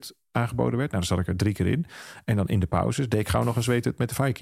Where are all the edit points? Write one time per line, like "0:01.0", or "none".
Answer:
none